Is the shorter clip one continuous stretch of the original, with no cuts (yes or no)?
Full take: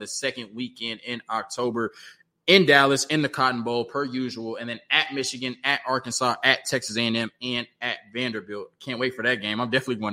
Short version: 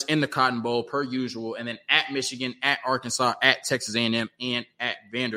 yes